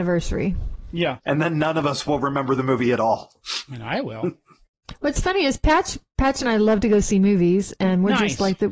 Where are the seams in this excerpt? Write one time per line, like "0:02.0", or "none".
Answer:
0:01.2